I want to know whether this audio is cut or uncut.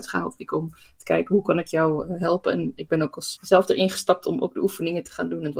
cut